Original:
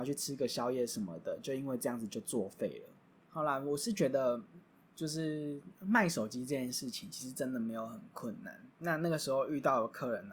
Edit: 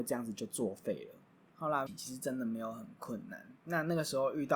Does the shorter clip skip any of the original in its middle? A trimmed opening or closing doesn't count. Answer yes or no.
yes